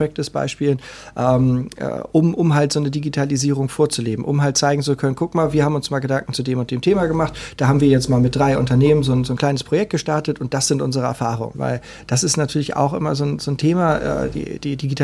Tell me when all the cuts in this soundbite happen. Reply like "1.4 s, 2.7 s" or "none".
11.5 s